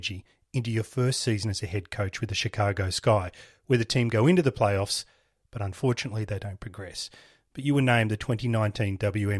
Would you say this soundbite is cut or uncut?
uncut